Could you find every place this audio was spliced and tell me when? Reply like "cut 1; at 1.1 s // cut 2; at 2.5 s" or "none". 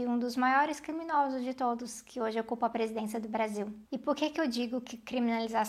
none